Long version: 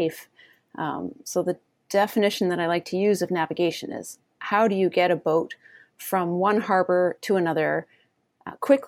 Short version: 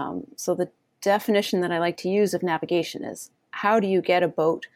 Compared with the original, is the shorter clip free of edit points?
yes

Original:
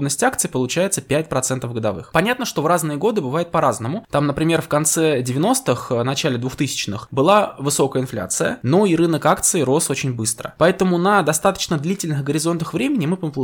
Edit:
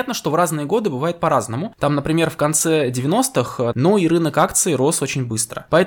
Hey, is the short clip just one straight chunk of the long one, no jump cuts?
no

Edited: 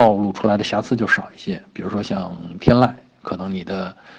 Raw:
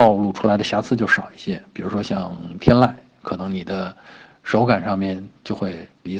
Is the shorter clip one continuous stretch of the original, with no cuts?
yes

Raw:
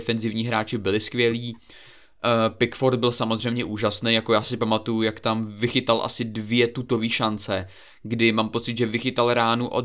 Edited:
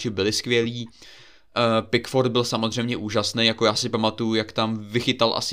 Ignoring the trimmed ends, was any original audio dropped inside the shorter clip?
no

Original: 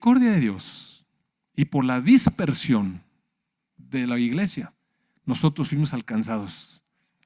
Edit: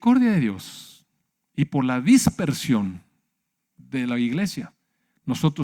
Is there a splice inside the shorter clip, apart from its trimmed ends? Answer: no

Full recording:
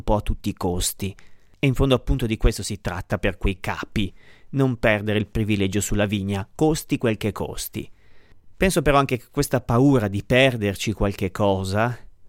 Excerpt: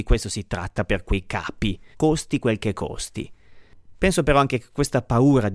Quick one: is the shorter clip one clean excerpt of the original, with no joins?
no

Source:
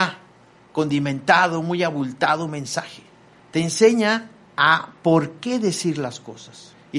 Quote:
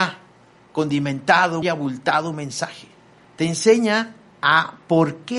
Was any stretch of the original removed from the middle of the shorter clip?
yes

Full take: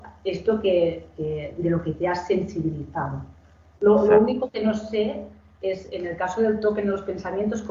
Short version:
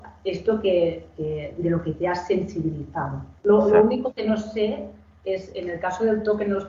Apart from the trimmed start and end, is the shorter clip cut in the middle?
yes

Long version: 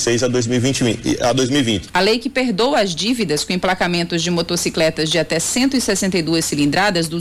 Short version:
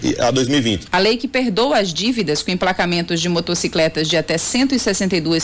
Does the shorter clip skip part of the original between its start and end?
no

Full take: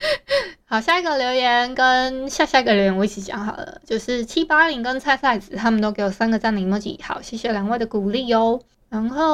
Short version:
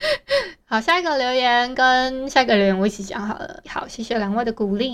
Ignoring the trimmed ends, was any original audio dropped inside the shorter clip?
yes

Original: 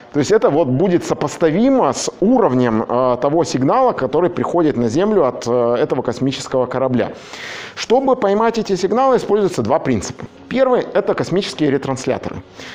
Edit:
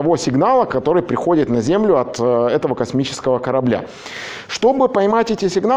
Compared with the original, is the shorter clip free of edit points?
yes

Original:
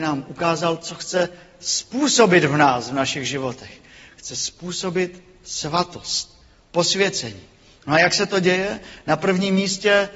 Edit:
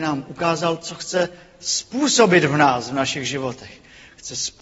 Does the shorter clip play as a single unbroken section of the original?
yes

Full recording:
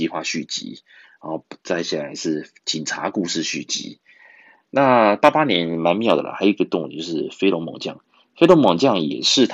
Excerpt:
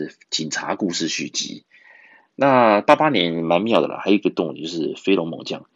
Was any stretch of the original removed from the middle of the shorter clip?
no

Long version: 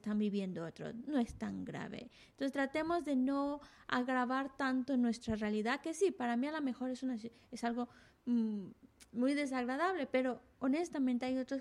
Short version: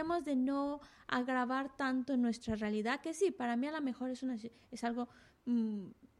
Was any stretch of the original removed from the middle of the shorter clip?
no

